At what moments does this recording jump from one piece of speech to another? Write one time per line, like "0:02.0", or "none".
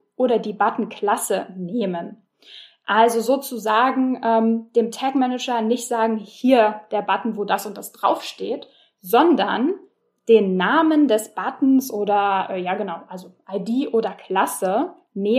none